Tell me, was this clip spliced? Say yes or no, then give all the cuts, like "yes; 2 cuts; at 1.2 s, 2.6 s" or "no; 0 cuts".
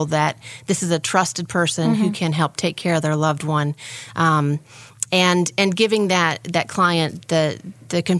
no; 0 cuts